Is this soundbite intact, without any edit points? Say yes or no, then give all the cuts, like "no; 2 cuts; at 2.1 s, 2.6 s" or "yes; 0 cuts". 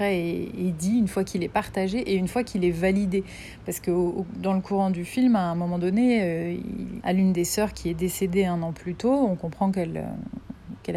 no; 1 cut; at 7.0 s